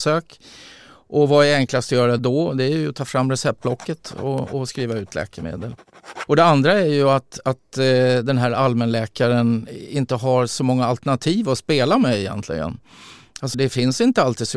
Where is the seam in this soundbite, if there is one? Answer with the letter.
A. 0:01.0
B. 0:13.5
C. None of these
B